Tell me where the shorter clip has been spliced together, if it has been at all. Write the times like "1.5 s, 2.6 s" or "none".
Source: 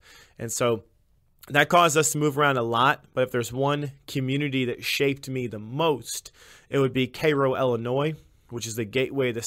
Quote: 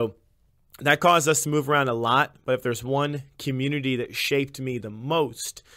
none